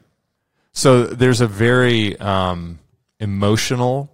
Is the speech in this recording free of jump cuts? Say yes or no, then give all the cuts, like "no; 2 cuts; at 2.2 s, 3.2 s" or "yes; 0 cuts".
yes; 0 cuts